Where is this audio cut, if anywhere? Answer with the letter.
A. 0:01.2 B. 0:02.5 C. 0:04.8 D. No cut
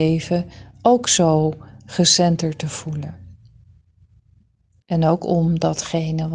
C